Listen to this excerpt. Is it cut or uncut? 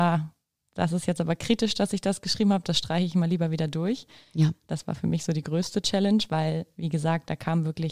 uncut